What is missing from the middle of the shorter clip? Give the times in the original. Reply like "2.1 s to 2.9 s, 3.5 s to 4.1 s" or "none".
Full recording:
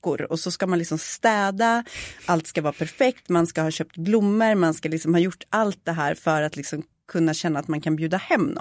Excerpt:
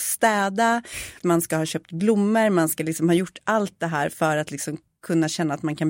2.2 s to 3.2 s